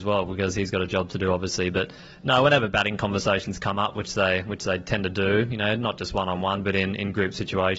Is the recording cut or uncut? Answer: uncut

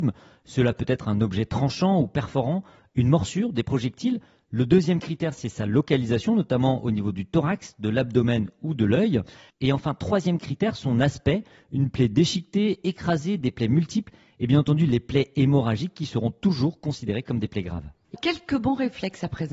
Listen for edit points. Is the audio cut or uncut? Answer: cut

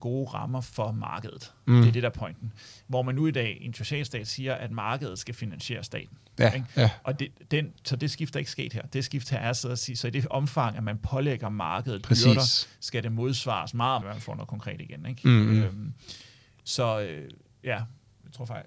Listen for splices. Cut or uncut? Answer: cut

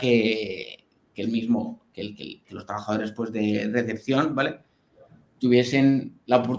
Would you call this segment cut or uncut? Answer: uncut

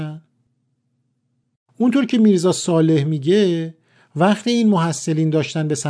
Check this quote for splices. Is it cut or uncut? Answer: uncut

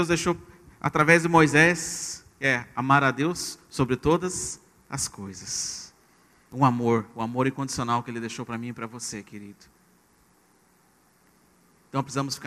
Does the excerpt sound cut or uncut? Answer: uncut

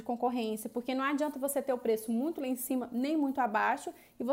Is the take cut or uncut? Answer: uncut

